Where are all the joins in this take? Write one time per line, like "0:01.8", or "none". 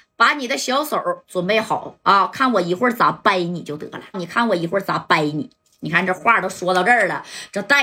0:04.1